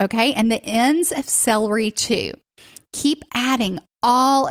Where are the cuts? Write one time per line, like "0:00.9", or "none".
none